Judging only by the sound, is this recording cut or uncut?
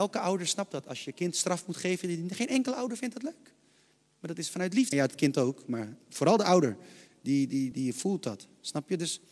cut